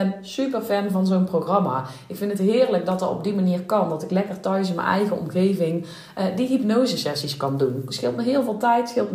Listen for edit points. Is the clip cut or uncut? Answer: uncut